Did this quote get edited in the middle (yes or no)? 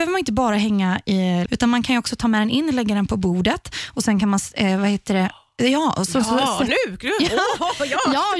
yes